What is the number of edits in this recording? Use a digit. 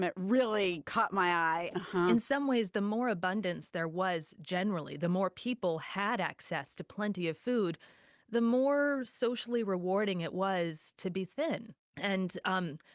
1